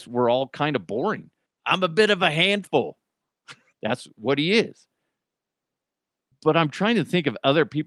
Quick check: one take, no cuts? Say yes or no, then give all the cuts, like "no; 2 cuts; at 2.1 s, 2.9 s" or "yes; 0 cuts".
no; 2 cuts; at 1.5 s, 3.7 s